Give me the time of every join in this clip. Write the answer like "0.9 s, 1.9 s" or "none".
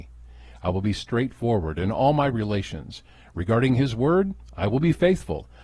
none